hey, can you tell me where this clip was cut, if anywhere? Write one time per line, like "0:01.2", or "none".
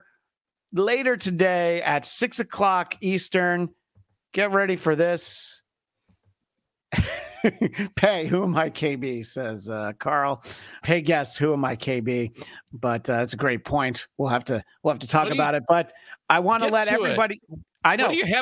0:10.8
0:12.6